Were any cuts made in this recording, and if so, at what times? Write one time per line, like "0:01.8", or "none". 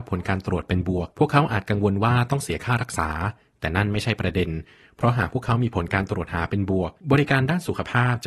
0:01.1
0:07.0